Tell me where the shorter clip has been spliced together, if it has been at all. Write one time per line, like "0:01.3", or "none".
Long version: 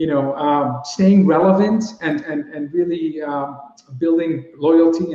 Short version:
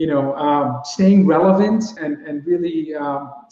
0:02.0